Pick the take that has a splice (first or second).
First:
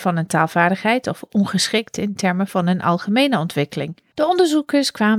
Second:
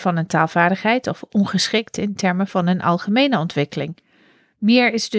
first